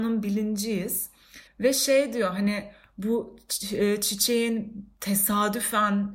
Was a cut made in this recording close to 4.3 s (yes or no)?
no